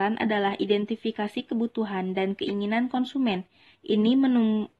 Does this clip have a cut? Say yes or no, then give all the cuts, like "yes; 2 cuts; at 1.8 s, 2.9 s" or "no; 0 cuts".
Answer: no; 0 cuts